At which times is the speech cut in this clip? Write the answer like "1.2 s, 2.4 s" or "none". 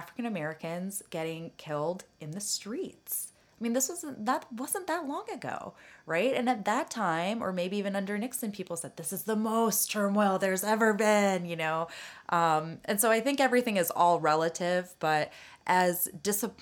none